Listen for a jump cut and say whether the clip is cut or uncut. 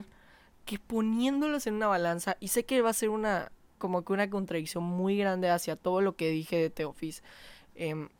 uncut